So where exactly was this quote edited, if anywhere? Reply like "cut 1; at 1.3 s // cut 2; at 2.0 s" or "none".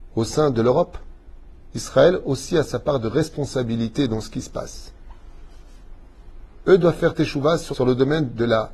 cut 1; at 1.7 s // cut 2; at 6.6 s // cut 3; at 7.7 s